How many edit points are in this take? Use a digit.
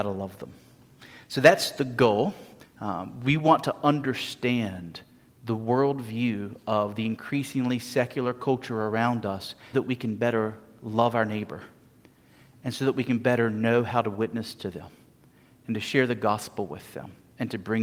2